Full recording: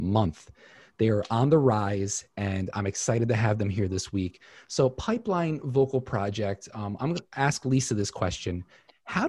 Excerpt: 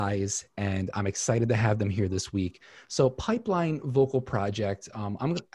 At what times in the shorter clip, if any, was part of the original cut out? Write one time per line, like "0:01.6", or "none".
none